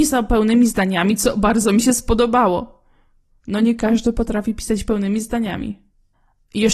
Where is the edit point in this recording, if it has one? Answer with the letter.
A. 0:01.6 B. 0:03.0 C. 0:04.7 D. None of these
D